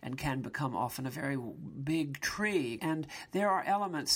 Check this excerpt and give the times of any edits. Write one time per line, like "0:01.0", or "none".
0:02.8